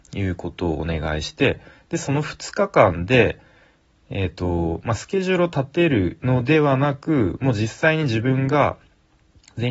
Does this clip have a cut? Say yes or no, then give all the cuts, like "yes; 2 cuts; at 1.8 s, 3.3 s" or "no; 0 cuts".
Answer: no; 0 cuts